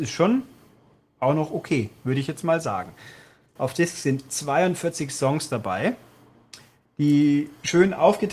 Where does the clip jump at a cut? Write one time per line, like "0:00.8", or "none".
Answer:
0:03.6

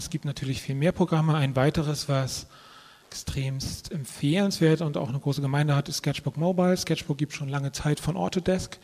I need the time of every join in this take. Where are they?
none

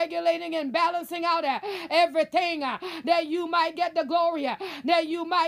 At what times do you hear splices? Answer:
none

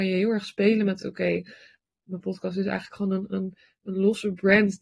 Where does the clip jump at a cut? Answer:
none

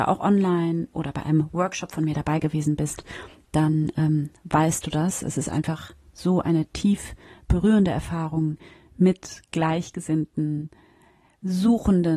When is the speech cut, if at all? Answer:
none

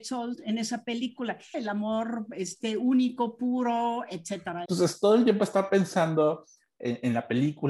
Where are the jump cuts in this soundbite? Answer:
0:01.5
0:04.7

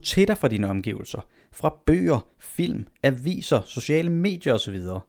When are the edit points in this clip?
none

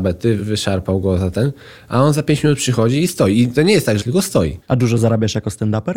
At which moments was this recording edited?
0:04.0

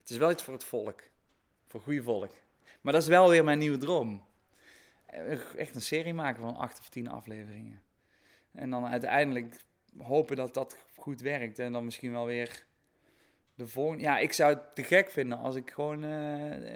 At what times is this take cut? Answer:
none

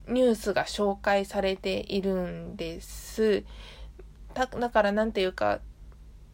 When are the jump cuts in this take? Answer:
none

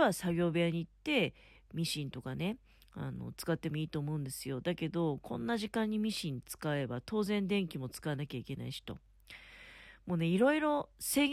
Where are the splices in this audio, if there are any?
none

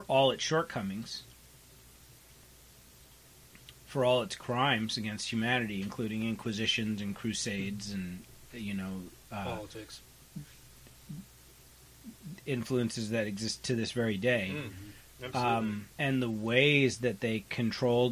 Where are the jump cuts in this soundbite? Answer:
0:15.9

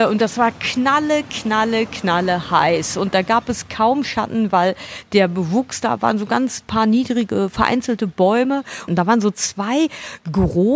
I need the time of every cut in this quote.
0:08.9

